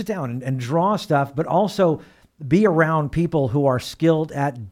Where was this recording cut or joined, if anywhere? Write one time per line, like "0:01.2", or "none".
none

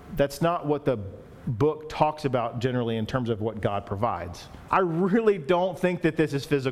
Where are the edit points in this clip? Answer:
0:04.7

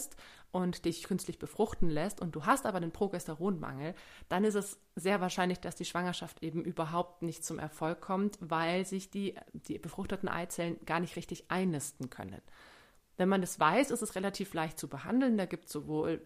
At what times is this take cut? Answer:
none

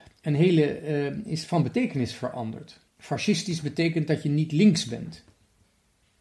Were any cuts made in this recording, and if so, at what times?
0:02.9

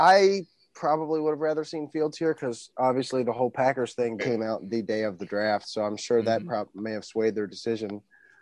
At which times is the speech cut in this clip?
0:04.2

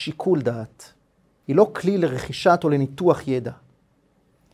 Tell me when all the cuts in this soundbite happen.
0:01.4

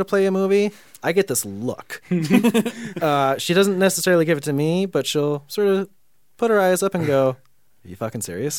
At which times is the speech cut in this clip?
none

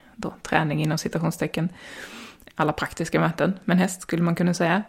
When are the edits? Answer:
0:02.5

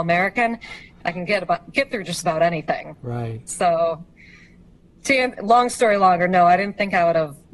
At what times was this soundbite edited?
0:01.0

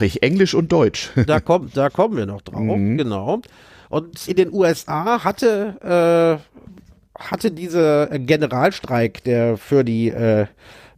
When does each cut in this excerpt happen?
0:04.3

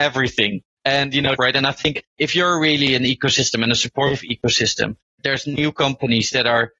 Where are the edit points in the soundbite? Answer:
0:01.4

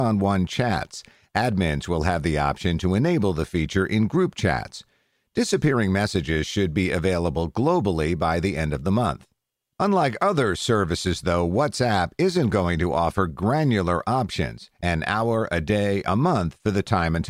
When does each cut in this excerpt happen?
none

